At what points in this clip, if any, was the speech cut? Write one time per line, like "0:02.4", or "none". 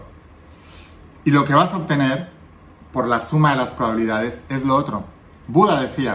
none